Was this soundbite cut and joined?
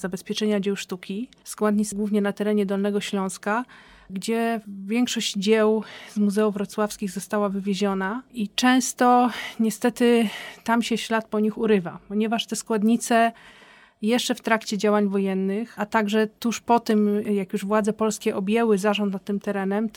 no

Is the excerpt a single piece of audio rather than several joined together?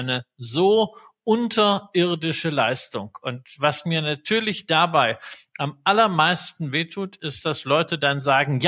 yes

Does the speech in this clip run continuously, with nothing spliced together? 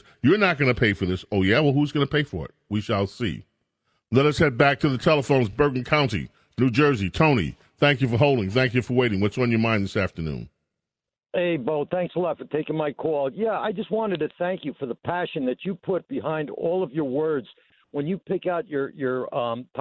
yes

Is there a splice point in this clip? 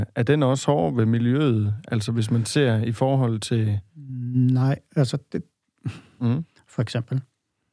yes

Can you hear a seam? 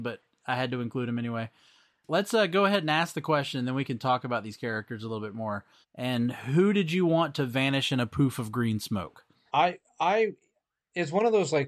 yes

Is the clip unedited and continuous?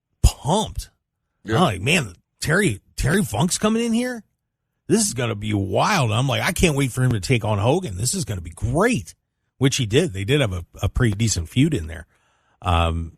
yes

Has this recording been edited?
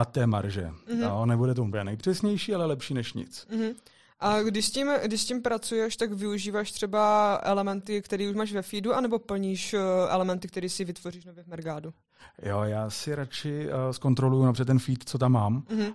no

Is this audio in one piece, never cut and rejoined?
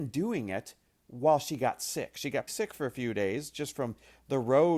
no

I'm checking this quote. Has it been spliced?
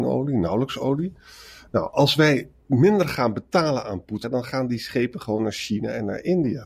yes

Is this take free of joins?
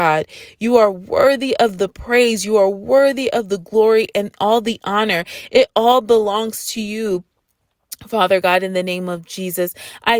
yes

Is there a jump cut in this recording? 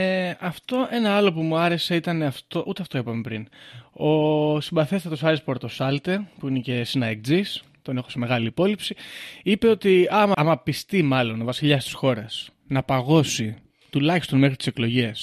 yes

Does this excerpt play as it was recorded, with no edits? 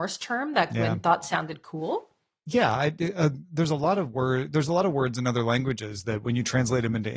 yes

